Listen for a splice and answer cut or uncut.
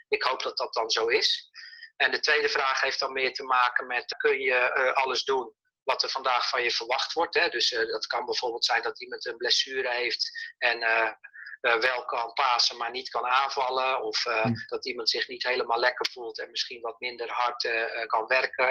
cut